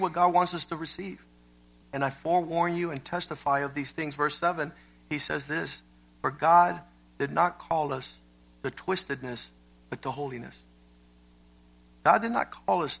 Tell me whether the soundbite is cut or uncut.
cut